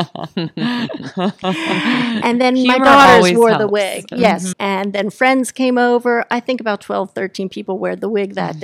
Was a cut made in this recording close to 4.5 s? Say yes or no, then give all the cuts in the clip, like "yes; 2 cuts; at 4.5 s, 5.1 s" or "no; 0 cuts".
yes; 1 cut; at 4.5 s